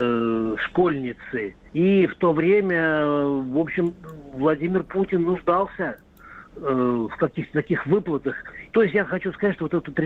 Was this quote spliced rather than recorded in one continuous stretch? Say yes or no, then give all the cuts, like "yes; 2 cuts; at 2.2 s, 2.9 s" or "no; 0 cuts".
yes; 2 cuts; at 1.7 s, 8.7 s